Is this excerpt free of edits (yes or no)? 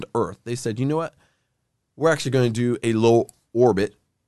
yes